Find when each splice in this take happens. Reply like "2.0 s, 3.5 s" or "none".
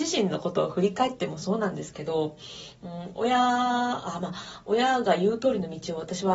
none